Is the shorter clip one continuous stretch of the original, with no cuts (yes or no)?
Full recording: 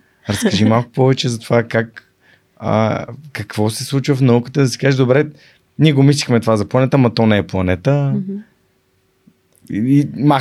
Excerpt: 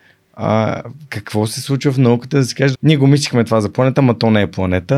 no